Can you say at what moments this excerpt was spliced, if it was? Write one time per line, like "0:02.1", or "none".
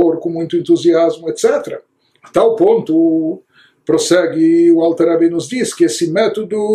none